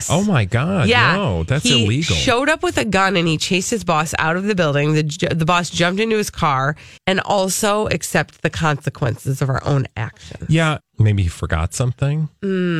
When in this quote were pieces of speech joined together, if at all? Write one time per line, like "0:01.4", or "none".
0:07.0
0:10.8